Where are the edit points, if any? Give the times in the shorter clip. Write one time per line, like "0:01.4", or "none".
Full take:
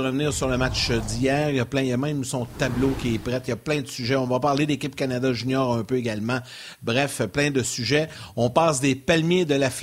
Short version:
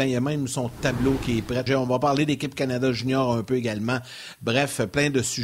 0:01.7